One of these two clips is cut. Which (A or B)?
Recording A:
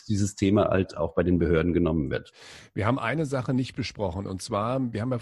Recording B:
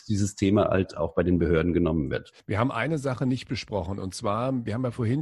B